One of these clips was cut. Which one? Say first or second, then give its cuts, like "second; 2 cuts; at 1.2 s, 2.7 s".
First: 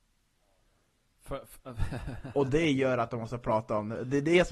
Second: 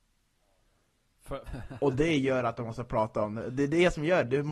second; 1 cut; at 1.5 s